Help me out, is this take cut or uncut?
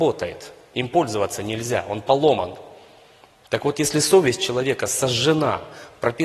uncut